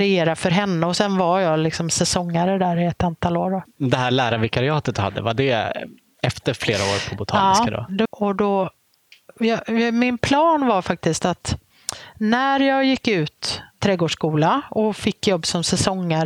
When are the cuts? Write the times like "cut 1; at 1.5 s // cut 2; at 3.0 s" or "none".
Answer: cut 1; at 8.1 s